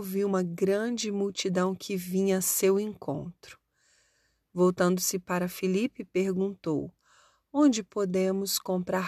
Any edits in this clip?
no; 0 cuts

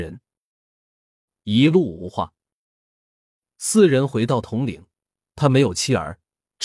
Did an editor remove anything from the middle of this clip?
yes; 1 cut; at 5.2 s

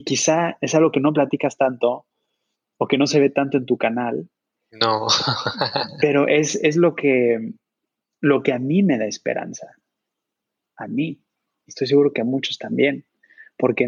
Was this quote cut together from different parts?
no; 0 cuts

